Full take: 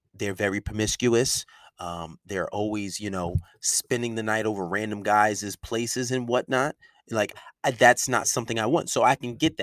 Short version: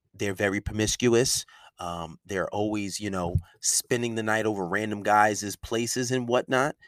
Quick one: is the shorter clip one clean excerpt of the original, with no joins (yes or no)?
yes